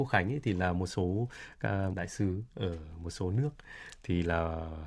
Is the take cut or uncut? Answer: cut